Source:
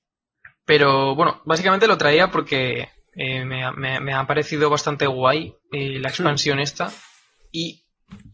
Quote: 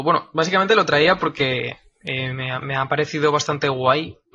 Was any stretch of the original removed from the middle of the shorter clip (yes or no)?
yes